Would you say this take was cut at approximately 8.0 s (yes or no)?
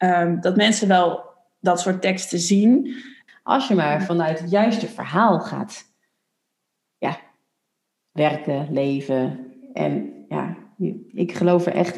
no